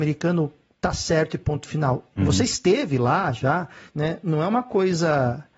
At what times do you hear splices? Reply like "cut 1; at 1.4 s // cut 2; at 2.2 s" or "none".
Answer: cut 1; at 2.1 s // cut 2; at 3.9 s